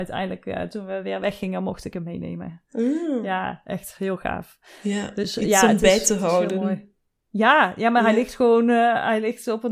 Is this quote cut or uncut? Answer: uncut